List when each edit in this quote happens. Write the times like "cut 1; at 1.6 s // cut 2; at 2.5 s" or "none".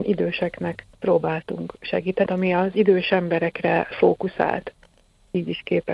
cut 1; at 2.3 s